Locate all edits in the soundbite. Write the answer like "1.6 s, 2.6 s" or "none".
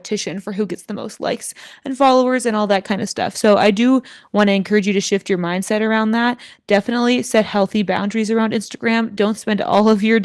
none